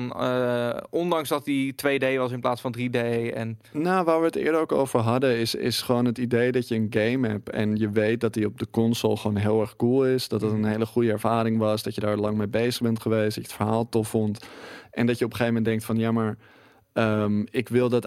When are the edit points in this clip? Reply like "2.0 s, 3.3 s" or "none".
none